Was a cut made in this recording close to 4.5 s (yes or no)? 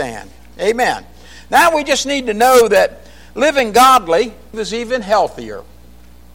yes